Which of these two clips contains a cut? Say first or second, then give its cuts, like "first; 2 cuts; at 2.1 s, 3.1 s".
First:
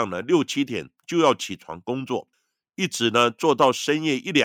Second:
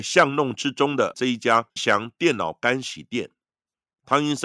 second; 1 cut; at 1.8 s